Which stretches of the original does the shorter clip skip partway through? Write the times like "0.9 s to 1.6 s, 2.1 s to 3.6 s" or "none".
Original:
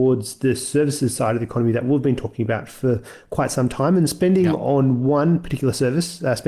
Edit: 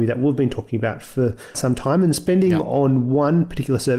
3.2 s to 3.5 s